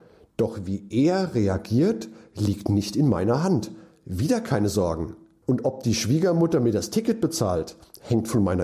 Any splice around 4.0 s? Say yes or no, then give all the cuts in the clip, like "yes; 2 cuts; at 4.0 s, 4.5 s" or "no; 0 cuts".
no; 1 cut; at 5.4 s